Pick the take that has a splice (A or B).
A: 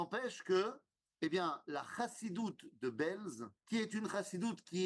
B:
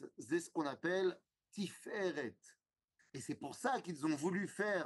A